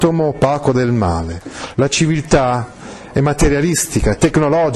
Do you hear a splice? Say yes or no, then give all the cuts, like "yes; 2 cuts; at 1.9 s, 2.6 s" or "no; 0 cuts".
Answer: yes; 1 cut; at 1.7 s